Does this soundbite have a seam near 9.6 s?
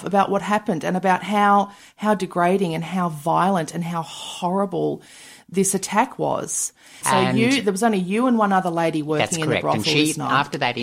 no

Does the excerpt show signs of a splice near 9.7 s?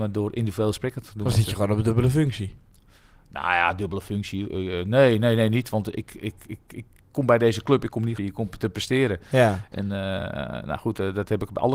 yes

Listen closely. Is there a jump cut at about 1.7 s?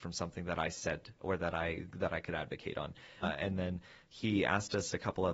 no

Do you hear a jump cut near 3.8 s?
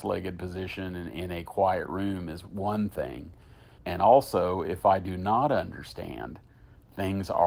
yes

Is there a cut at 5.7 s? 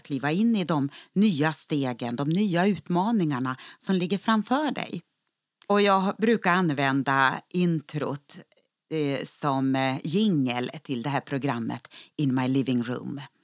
yes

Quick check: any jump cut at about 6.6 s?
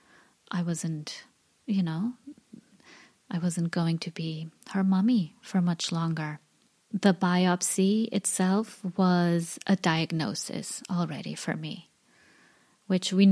no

